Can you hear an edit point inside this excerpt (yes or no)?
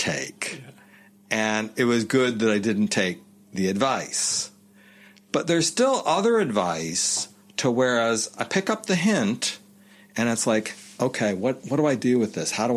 no